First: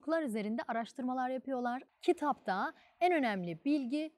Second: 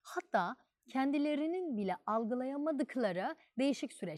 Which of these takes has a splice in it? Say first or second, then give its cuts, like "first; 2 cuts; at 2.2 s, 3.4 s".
first; 1 cut; at 1.9 s